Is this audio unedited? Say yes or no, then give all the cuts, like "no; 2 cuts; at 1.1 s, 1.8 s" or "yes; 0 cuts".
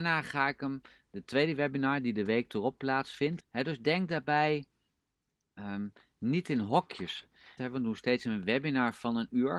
no; 2 cuts; at 3.4 s, 7.6 s